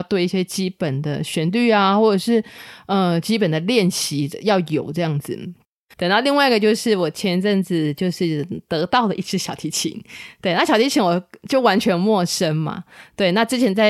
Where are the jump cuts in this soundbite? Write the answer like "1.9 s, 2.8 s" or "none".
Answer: 5.9 s